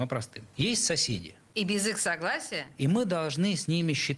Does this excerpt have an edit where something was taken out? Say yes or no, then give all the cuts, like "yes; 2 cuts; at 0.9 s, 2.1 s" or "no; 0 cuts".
no; 0 cuts